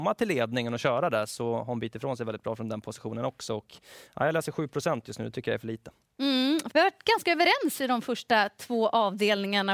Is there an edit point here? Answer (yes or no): yes